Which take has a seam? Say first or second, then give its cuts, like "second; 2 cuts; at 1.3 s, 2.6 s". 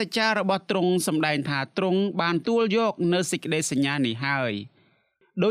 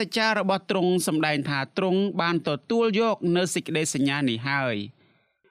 first; 1 cut; at 2.4 s